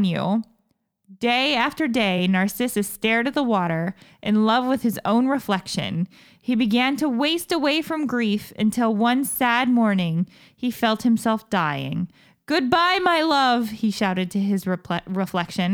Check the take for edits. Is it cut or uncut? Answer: uncut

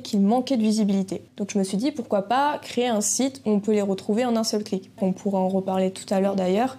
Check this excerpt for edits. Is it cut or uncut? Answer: cut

